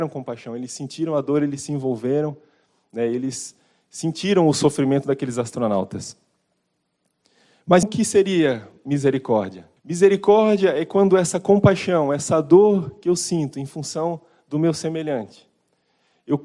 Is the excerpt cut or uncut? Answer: cut